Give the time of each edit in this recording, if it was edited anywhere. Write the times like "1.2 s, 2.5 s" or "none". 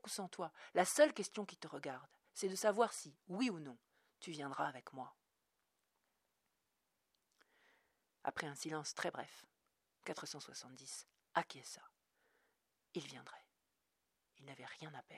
none